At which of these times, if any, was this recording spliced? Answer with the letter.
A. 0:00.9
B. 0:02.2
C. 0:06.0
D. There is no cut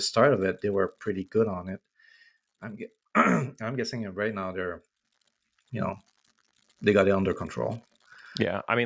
D